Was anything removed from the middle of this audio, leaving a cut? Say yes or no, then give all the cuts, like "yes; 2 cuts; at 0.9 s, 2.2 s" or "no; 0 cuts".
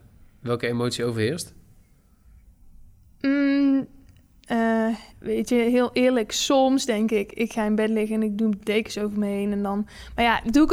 yes; 1 cut; at 5.1 s